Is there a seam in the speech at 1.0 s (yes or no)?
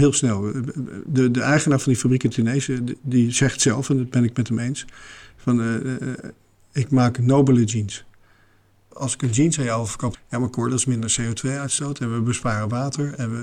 no